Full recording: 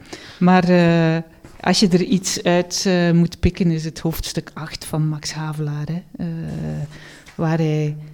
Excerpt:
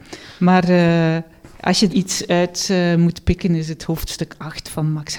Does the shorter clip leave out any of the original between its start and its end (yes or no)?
yes